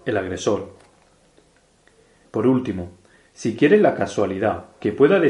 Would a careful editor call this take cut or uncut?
cut